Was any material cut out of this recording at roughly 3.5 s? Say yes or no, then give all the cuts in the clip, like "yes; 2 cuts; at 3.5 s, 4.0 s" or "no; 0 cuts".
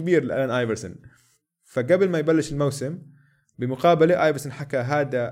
no; 0 cuts